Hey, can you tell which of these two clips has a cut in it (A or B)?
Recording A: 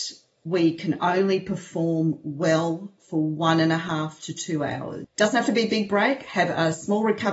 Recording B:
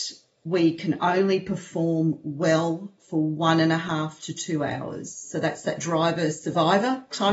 A